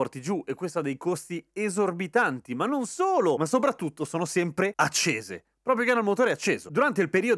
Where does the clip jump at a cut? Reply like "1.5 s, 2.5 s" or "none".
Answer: 3.4 s

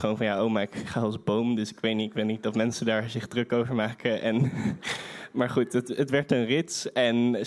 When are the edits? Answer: none

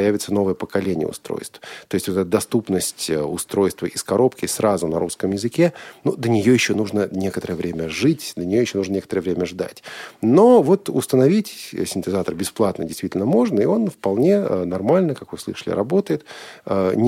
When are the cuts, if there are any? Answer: none

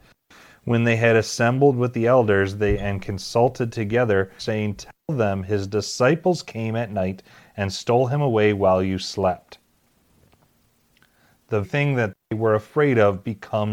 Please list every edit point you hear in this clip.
4.4 s, 11.6 s

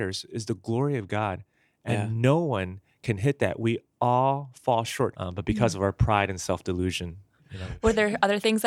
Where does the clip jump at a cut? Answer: 5.1 s

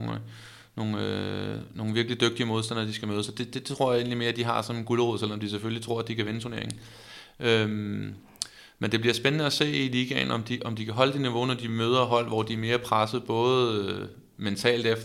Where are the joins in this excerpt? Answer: none

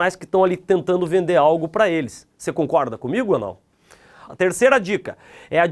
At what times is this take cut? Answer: 4.3 s

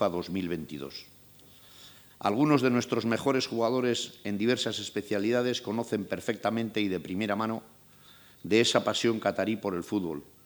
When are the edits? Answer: 2.1 s

